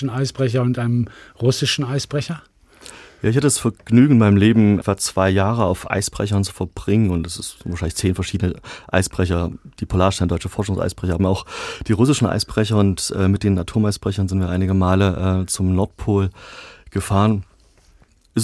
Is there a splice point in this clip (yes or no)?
yes